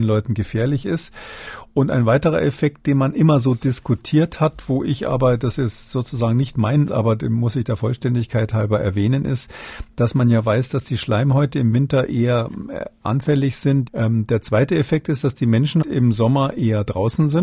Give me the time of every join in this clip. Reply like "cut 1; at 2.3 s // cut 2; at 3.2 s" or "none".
cut 1; at 6.9 s // cut 2; at 13.9 s // cut 3; at 15.8 s